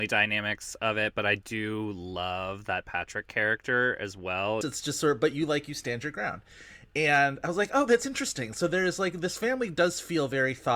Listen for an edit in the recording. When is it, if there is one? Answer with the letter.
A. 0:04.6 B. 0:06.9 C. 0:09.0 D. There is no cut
A